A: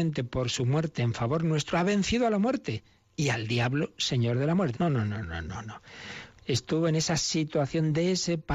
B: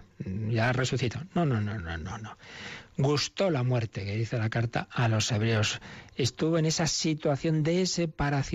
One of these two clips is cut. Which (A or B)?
A